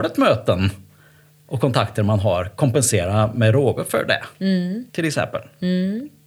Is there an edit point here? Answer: yes; 1 cut; at 4.9 s

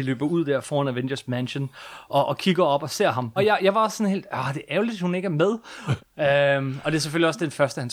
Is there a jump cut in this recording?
yes; 2 cuts; at 3.4 s, 6.0 s

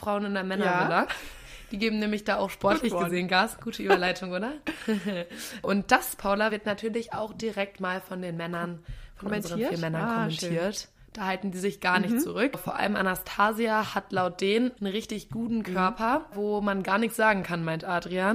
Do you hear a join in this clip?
no; 0 cuts

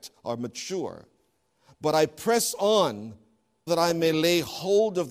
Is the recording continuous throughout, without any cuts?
no; 1 cut; at 3.7 s

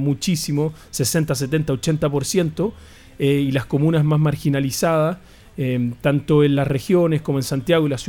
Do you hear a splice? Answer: no; 0 cuts

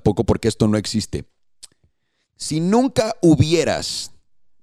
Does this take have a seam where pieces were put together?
no; 0 cuts

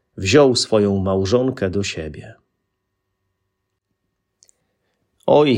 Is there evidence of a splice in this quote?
no; 0 cuts

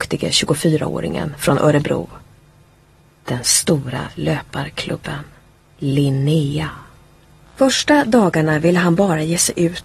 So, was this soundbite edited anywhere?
yes; 2 cuts; at 5.7 s, 7.5 s

